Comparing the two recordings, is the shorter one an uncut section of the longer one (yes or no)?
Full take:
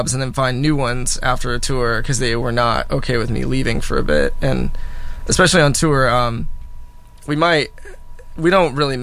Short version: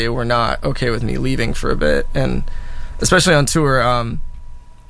yes